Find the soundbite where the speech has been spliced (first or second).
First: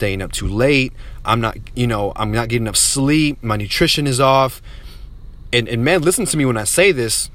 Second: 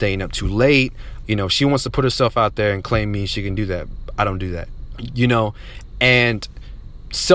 second